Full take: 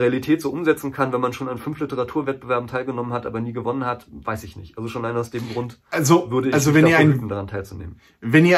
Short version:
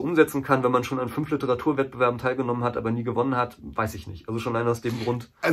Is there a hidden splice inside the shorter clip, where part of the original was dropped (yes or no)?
no